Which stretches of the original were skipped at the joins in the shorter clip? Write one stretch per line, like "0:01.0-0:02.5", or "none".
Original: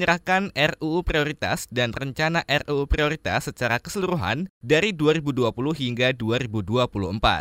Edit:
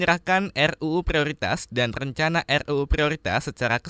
none